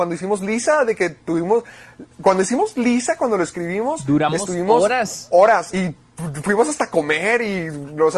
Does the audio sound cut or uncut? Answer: cut